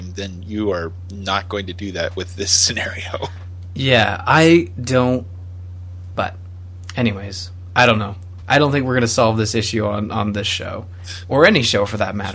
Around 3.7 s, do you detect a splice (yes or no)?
no